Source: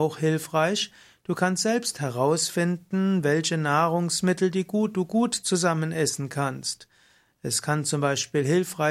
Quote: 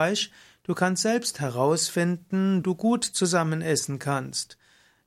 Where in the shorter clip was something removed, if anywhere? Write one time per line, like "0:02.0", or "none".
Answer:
0:02.6